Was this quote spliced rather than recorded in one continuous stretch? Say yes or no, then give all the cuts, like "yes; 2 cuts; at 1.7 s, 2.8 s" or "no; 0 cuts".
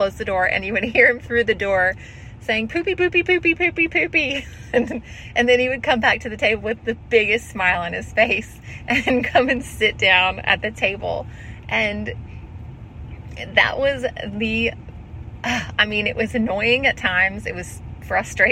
no; 0 cuts